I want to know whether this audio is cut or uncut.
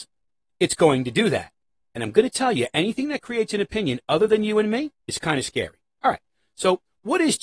cut